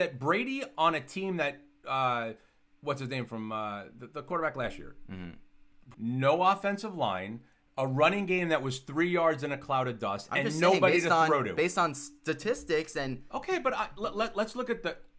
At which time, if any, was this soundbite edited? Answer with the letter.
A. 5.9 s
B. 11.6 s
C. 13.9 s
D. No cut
A